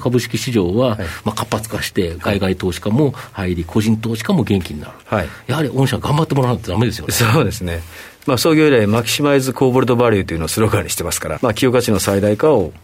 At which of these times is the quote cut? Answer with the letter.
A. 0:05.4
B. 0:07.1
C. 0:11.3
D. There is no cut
C